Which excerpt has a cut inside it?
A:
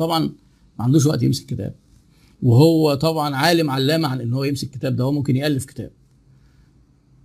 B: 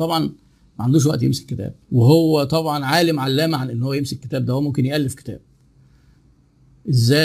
B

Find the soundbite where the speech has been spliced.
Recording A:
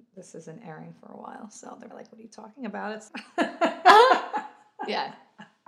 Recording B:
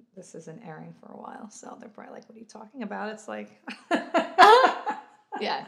A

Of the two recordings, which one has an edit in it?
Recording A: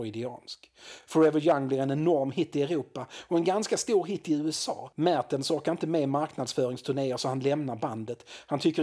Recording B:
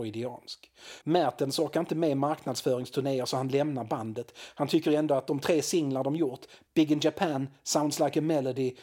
B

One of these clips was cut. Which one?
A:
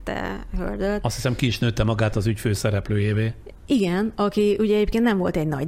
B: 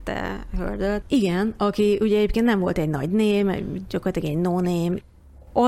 B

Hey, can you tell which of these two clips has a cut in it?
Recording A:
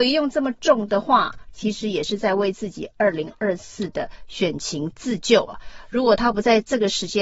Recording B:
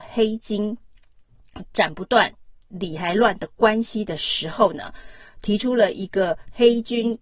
A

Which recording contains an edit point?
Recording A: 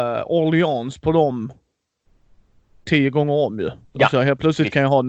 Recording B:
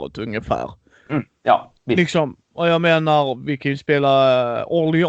B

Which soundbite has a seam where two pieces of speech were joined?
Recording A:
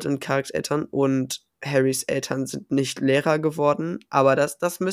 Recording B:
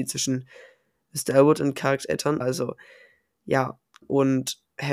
B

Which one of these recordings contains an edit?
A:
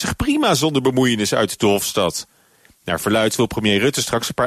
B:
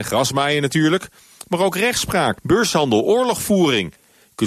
B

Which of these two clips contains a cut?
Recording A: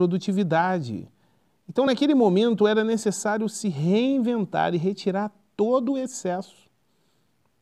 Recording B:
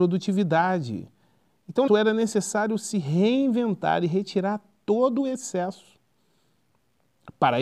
B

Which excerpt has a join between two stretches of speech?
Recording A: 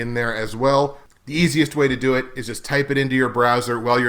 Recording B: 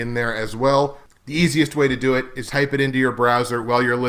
B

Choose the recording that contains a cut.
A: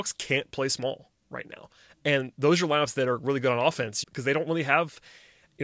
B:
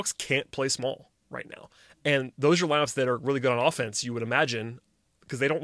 A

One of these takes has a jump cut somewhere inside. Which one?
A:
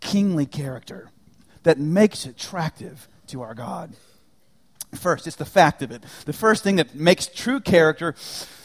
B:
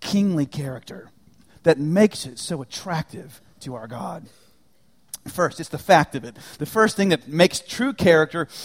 A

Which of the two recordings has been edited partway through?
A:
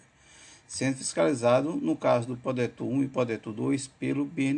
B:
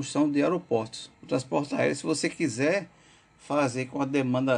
B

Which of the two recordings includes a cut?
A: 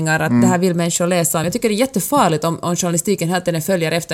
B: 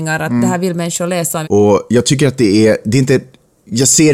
B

